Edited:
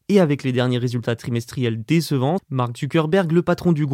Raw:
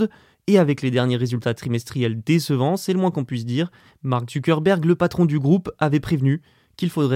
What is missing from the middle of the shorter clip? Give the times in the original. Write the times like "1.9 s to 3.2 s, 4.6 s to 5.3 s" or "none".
2.8 s to 3.9 s